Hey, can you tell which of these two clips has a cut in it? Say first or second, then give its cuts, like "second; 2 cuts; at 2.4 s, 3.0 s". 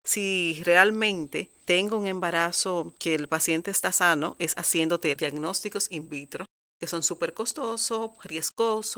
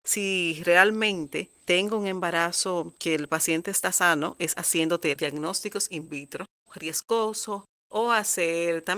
second; 1 cut; at 6.7 s